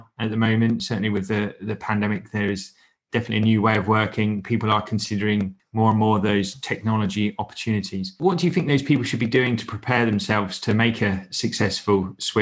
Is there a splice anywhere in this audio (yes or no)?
no